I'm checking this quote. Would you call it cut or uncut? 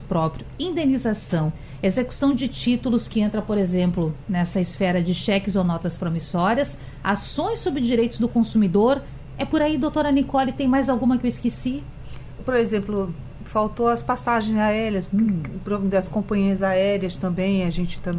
cut